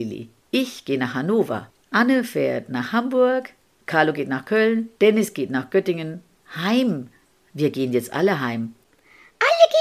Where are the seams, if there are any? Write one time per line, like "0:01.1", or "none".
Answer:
0:05.0
0:06.4